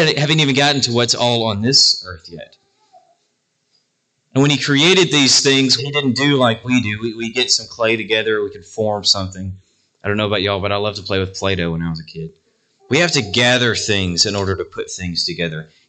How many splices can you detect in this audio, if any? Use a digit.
2